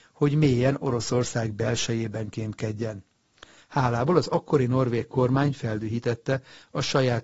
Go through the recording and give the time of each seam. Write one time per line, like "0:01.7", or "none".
0:03.6